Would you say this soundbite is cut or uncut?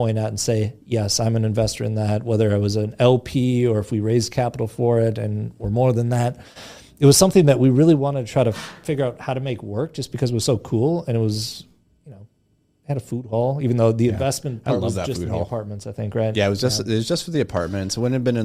uncut